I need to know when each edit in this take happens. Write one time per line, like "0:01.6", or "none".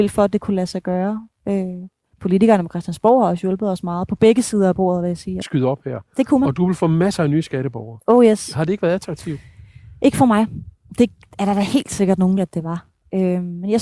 0:05.4
0:12.4